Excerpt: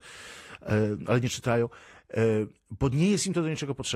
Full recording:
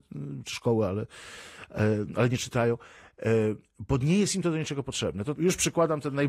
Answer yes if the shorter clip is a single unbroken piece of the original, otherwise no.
yes